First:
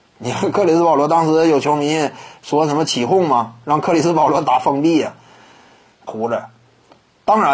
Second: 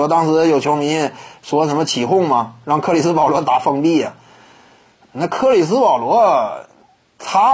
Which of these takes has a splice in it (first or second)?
first